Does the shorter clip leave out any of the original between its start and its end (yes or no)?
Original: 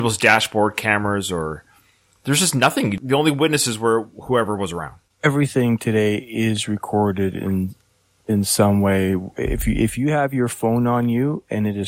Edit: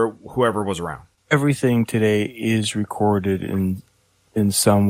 no